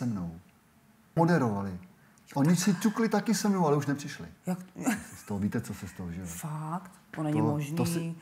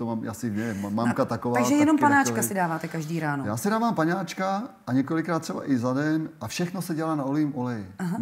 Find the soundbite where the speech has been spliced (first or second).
first